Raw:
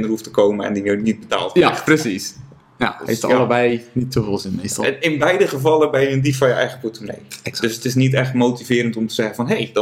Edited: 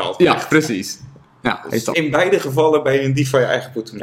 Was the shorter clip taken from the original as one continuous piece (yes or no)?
no